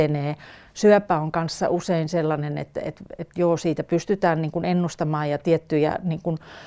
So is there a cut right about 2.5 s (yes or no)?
no